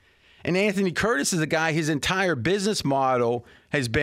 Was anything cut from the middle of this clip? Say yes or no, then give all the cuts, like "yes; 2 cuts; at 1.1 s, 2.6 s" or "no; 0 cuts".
no; 0 cuts